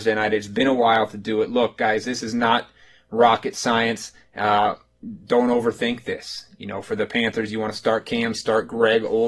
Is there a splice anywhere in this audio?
yes; 1 cut; at 8.3 s

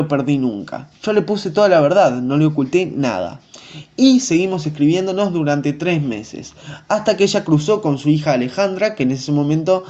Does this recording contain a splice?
no; 0 cuts

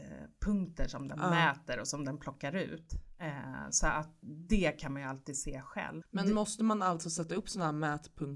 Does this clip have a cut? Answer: yes; 2 cuts; at 4.2 s, 6.0 s

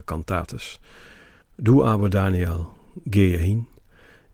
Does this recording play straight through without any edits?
no; 1 cut; at 1.4 s

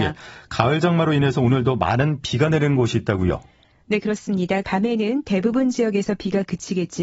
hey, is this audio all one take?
no; 1 cut; at 4.6 s

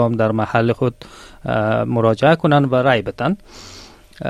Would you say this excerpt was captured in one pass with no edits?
yes; 0 cuts

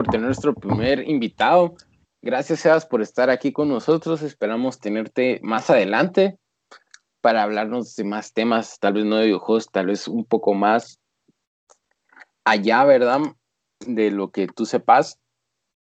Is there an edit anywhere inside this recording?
no; 0 cuts

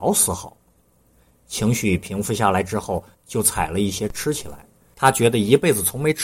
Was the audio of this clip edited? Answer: yes; 1 cut; at 3.1 s

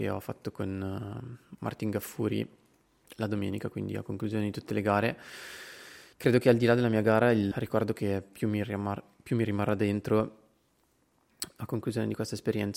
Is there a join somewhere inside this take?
yes; 2 cuts; at 6.1 s, 7.5 s

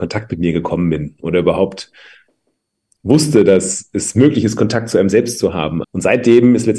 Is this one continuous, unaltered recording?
no; 1 cut; at 5.8 s

